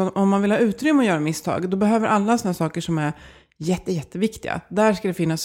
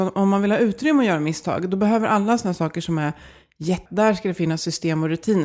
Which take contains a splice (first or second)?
second